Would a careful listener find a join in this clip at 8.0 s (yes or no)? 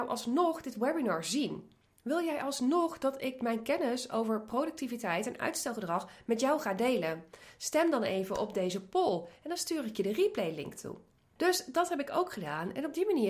no